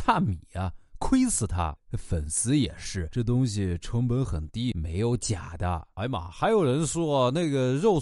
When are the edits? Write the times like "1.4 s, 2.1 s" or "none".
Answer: 1.8 s